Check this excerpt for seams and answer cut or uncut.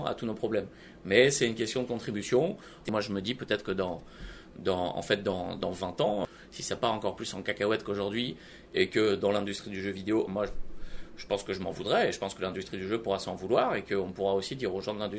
cut